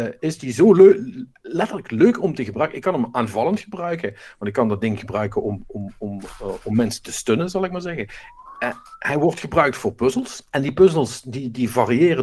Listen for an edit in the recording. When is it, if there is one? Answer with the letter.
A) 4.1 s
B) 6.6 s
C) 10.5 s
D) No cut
C